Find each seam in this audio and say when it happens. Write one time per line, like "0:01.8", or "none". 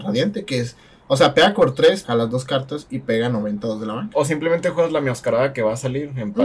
0:02.0
0:04.1